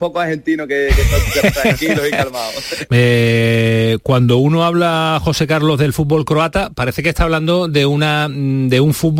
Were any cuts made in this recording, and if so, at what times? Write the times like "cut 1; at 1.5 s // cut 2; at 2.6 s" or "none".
cut 1; at 2.9 s